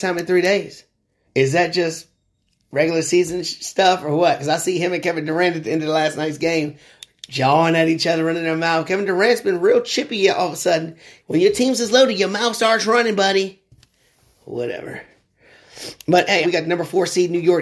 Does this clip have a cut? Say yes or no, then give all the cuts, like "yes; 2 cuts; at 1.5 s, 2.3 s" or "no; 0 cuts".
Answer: yes; 3 cuts; at 1.2 s, 11.2 s, 16.4 s